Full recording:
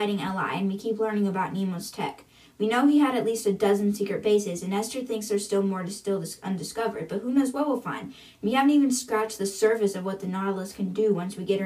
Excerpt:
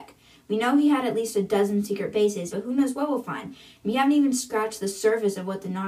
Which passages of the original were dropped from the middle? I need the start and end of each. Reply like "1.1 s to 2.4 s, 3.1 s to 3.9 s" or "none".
4.6 s to 7.1 s